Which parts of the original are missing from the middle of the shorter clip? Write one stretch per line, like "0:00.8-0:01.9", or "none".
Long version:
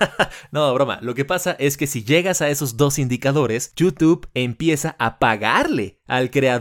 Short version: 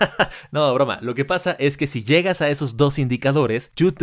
none